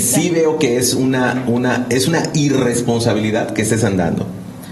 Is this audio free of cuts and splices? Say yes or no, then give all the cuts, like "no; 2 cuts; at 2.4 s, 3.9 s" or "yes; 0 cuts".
yes; 0 cuts